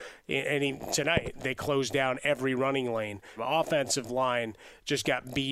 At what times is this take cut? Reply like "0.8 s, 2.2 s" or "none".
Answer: 1.4 s, 3.4 s